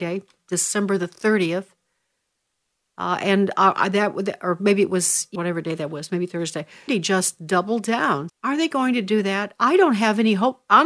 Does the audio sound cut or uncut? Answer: cut